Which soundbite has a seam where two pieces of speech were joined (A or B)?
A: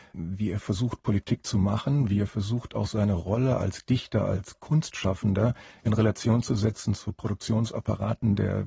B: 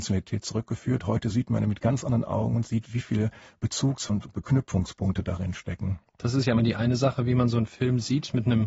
B